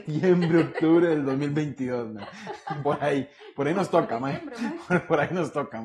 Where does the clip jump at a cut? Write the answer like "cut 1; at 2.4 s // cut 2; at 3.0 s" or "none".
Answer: none